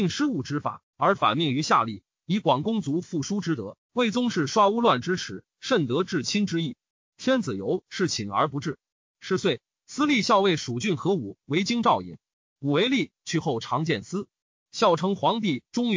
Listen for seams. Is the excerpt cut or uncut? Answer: cut